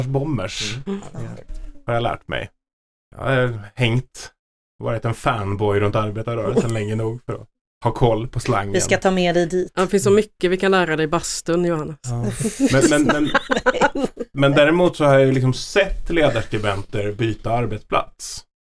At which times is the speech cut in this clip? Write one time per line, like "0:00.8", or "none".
none